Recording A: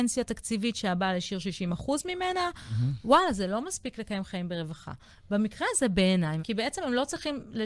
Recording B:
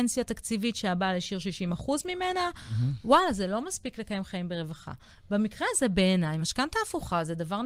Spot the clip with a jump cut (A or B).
A